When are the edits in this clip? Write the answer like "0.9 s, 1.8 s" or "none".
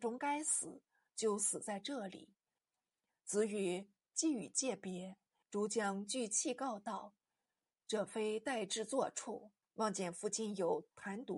2.6 s, 5.4 s, 9.6 s